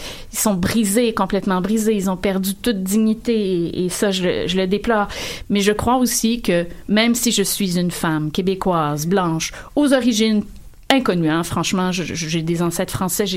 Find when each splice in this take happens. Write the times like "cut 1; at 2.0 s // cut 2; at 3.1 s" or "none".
cut 1; at 5.4 s